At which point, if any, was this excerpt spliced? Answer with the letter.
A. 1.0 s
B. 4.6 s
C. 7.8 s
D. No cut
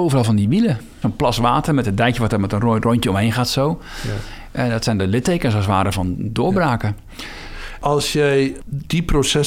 A